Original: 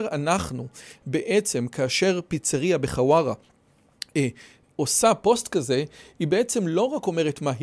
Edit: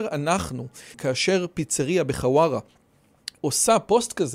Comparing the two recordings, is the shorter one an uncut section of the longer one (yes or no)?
no